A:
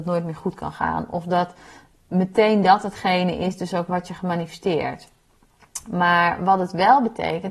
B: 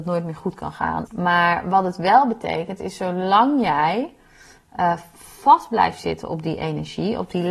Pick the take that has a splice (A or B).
B